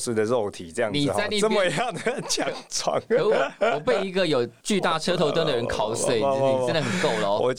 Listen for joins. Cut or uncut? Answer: uncut